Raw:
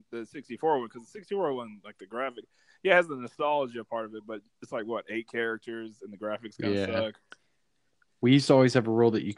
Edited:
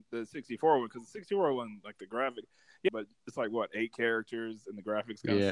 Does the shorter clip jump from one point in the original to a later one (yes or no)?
yes